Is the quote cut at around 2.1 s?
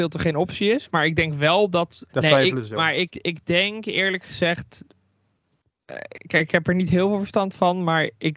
yes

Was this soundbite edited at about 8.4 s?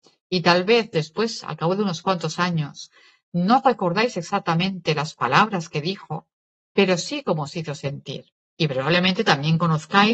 yes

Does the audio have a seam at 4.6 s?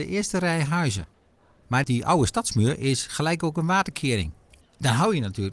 yes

